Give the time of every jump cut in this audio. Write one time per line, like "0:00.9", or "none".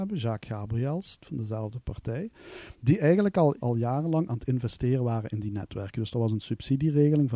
0:01.2
0:03.6